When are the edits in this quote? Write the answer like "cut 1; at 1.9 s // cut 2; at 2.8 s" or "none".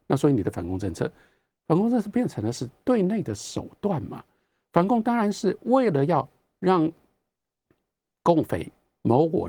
none